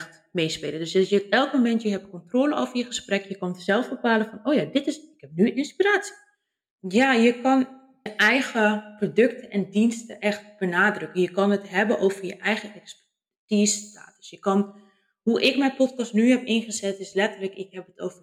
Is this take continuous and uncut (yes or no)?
no